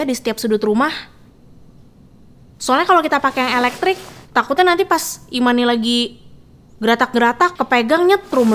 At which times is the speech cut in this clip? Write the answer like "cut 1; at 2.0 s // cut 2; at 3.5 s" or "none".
cut 1; at 7.6 s